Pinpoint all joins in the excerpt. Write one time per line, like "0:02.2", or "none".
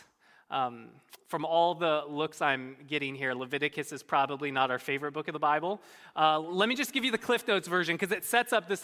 none